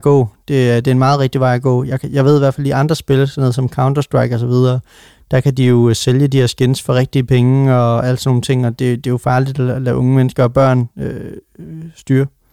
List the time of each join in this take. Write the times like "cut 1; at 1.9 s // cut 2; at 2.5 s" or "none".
none